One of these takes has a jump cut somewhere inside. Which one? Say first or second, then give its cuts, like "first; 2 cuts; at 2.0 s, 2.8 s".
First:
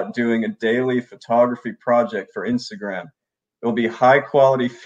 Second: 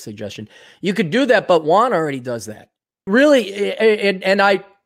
second; 1 cut; at 3.1 s